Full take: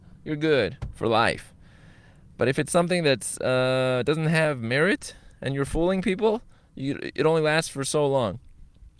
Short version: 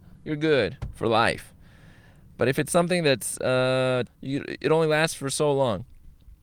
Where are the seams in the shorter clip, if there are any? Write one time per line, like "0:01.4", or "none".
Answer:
0:04.1